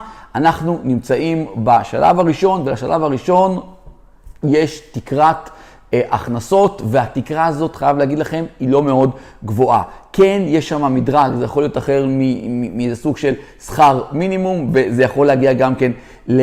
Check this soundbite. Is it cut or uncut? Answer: uncut